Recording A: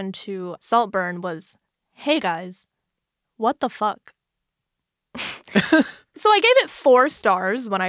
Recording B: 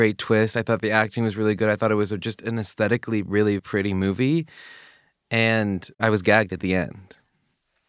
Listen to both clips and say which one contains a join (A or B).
B